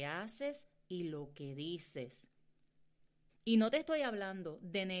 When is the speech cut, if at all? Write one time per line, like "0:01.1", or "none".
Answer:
0:03.3